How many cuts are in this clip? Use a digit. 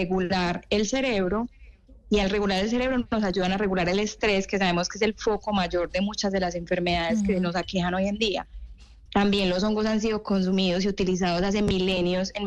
1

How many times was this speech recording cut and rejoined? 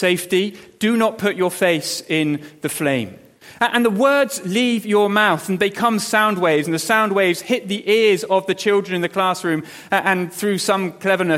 0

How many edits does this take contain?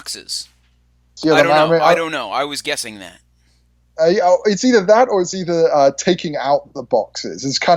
1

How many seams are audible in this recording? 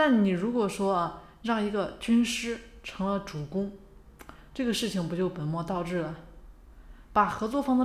0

